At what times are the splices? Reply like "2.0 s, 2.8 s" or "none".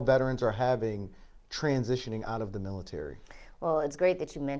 none

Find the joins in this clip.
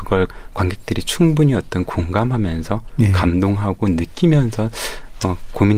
none

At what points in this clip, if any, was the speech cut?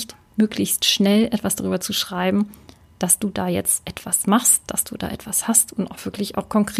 none

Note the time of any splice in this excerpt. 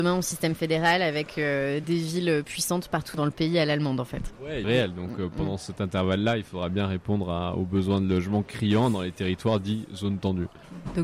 4.6 s

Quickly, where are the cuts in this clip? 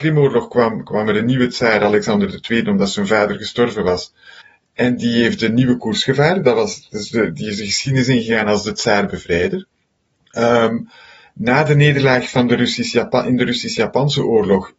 none

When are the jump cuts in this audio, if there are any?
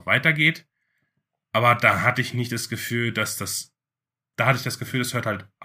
4.3 s

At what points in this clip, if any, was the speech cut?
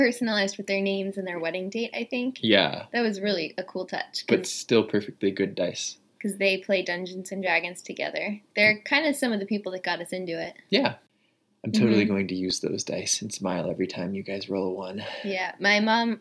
none

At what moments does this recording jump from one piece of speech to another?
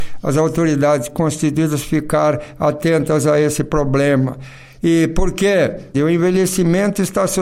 5.9 s

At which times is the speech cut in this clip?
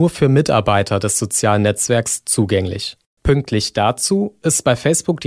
3.2 s

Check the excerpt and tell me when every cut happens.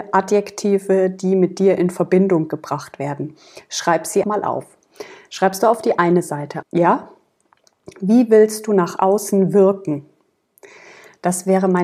4.2 s, 6.6 s

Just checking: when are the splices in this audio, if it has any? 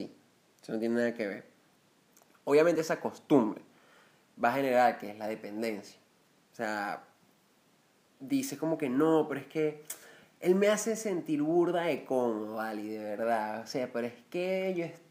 none

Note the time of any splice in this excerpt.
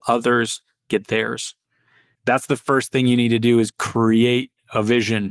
2.1 s

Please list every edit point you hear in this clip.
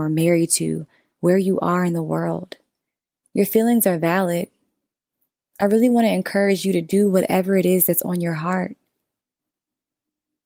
none

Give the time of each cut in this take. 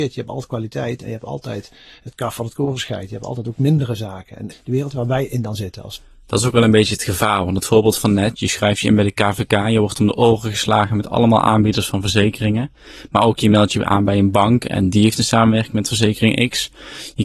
4.5 s

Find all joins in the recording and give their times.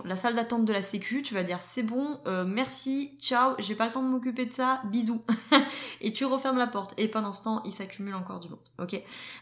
none

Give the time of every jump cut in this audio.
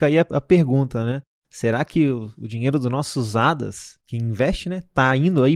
none

